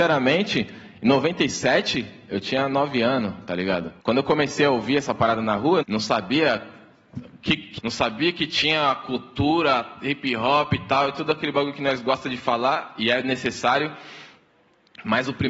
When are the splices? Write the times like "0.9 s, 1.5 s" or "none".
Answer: 4.0 s, 5.8 s, 7.8 s